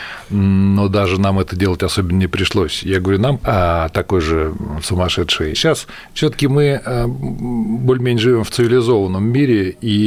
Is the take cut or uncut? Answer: cut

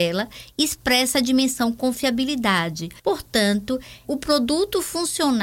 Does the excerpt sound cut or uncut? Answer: cut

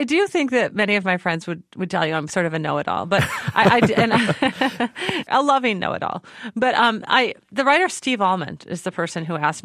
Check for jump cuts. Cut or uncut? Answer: uncut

